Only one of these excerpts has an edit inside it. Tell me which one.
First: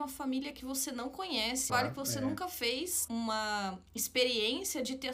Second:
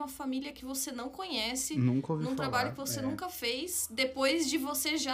first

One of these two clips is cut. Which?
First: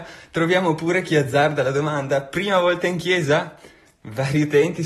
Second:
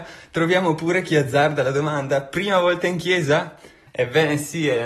second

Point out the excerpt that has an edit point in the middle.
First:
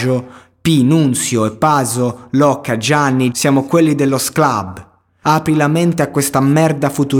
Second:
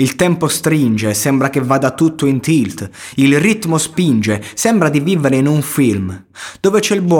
first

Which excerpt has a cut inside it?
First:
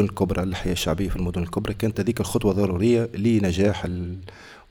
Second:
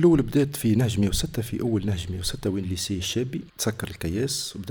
second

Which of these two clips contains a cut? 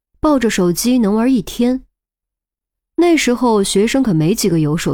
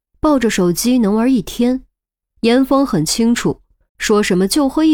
second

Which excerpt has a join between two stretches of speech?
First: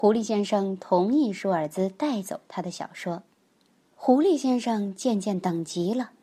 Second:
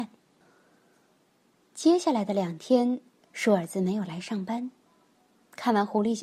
first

